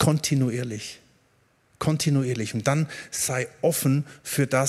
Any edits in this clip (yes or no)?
no